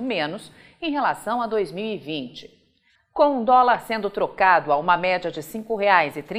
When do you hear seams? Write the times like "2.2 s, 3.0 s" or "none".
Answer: 3.0 s